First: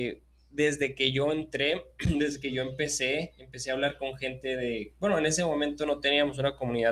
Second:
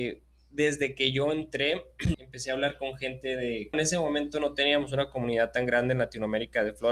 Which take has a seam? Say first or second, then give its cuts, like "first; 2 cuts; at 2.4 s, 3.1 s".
second; 2 cuts; at 2.1 s, 3.7 s